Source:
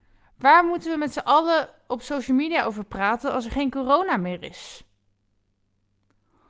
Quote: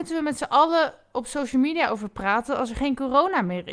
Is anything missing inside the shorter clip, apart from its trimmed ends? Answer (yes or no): no